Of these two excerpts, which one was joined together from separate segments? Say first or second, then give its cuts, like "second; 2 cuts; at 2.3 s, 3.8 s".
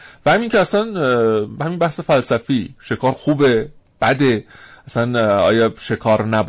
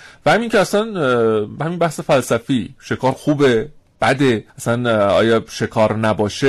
second; 1 cut; at 4.5 s